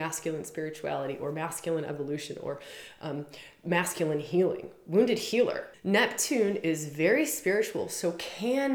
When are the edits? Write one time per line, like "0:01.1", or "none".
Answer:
0:05.7

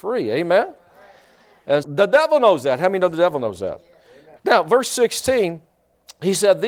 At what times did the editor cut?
0:01.8
0:04.4

